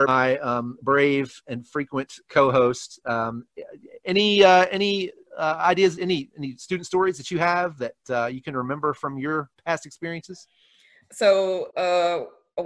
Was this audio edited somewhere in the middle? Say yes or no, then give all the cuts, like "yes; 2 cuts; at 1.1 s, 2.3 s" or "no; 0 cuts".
no; 0 cuts